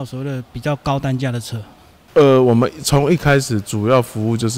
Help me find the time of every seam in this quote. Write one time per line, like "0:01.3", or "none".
none